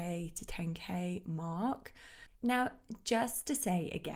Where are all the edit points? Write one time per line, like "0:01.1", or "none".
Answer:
0:02.3